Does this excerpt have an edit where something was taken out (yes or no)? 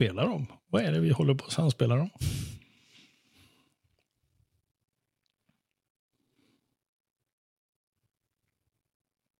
no